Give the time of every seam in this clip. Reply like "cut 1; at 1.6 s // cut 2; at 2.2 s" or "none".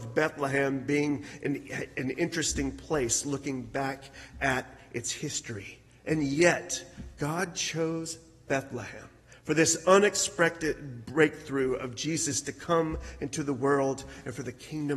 none